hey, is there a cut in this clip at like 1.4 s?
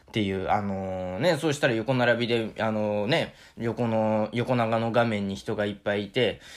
no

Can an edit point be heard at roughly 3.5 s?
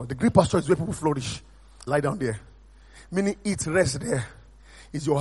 no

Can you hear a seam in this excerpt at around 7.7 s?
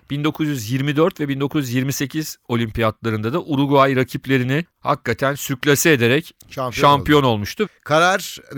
yes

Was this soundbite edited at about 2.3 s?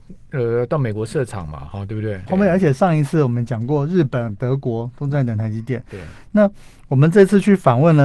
yes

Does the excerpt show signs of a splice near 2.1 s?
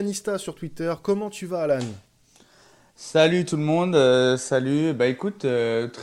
no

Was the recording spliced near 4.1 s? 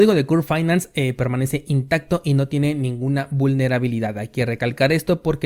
no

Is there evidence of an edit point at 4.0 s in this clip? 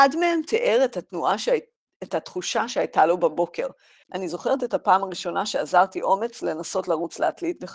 yes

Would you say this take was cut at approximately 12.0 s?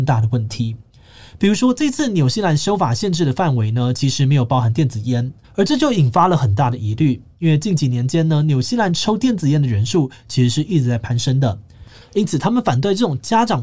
yes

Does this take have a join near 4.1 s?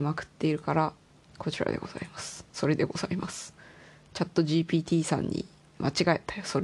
no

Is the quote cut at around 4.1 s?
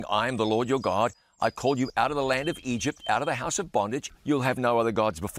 yes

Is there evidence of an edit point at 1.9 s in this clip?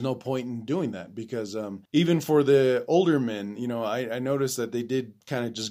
yes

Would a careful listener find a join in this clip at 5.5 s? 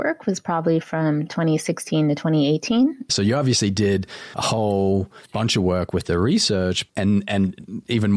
no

